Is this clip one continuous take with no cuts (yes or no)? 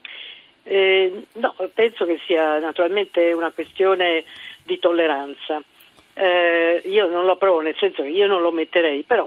no